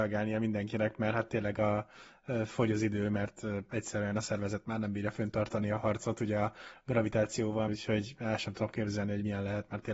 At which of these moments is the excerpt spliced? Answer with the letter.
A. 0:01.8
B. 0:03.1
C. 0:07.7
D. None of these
C